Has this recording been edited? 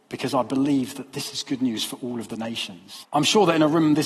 yes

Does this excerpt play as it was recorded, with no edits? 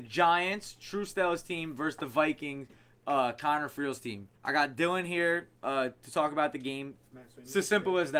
no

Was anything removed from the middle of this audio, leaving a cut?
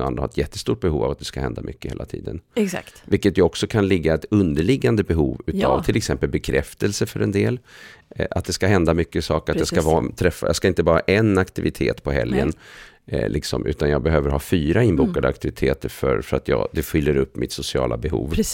no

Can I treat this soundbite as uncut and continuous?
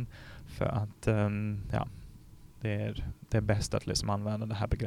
yes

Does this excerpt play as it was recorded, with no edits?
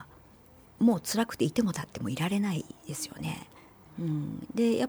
no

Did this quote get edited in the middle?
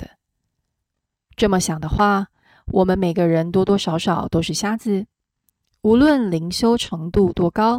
no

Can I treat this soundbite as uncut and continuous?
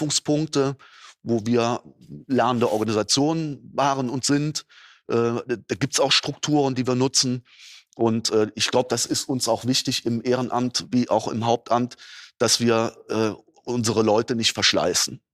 yes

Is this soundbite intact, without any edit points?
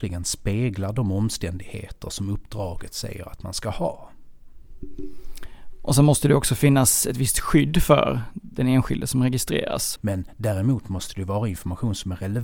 no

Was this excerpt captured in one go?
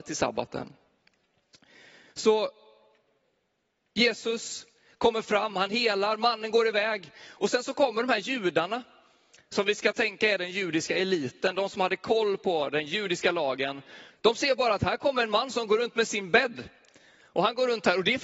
no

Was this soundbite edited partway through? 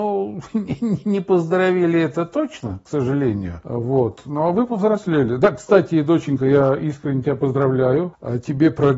no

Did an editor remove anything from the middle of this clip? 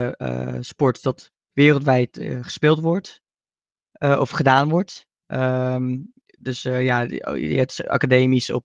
no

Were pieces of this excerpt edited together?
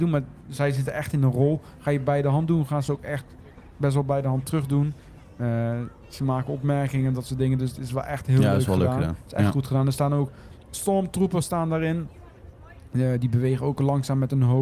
no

